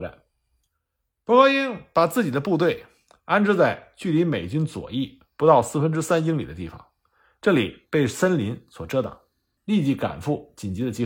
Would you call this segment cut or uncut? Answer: cut